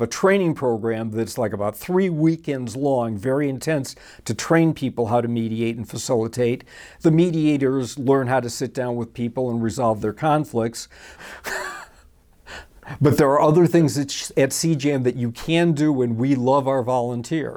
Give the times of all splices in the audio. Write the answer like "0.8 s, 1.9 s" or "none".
11.2 s